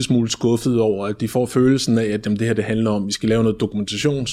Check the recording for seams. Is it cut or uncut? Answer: uncut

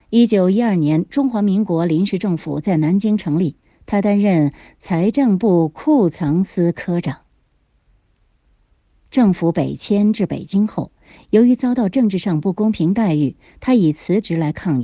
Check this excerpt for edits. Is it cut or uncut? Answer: uncut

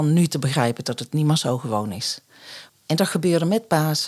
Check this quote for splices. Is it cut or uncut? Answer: cut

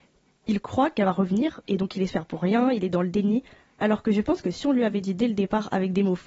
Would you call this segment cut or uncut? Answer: uncut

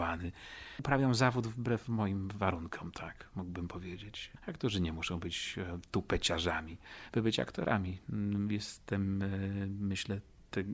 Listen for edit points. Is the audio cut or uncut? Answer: cut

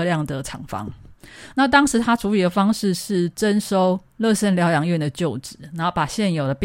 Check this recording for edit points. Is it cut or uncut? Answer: cut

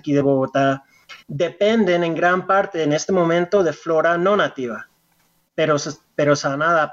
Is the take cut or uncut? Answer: cut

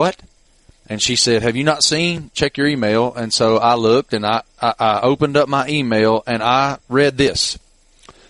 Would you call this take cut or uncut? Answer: uncut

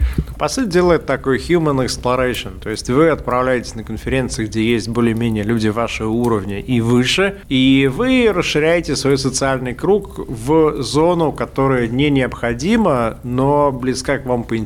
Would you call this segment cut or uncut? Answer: uncut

